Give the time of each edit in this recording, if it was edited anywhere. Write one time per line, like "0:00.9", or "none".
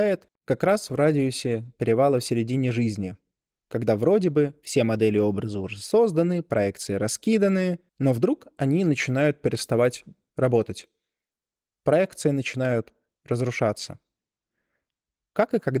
0:07.9